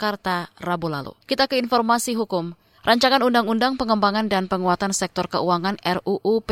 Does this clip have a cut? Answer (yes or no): yes